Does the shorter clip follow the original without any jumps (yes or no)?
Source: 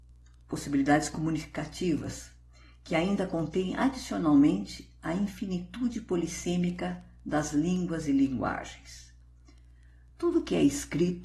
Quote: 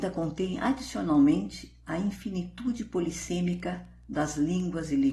yes